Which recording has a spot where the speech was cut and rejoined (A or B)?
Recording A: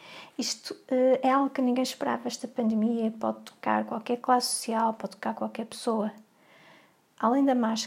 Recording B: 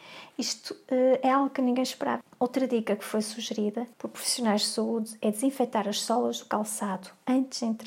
B